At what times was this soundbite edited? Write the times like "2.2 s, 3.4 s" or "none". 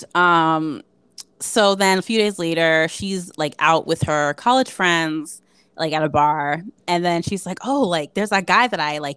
none

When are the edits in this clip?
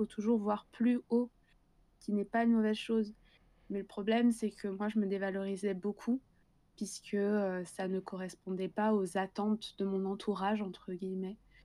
none

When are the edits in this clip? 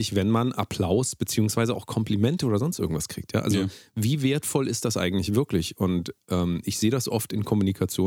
none

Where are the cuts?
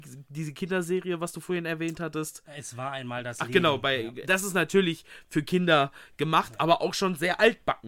4.2 s

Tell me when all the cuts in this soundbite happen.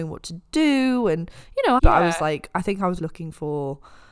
1.8 s, 3.0 s

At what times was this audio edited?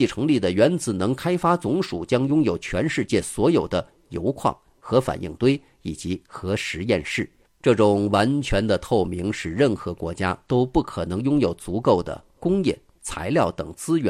7.5 s, 13.0 s

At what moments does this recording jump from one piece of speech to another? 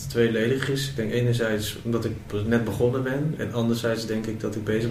3.4 s

